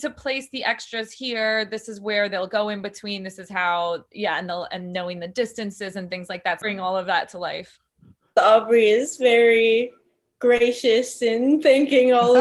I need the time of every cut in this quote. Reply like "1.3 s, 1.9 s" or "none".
6.6 s